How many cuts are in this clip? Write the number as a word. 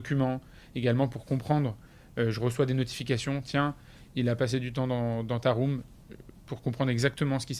zero